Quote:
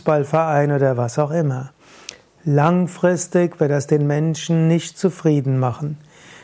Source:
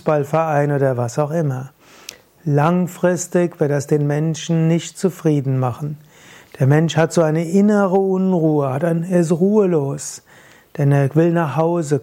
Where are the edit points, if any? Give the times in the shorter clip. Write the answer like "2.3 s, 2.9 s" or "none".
none

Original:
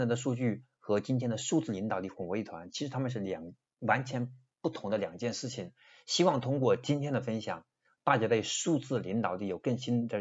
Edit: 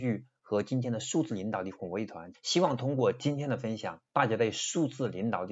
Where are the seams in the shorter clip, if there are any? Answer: 2.3 s, 4.1 s

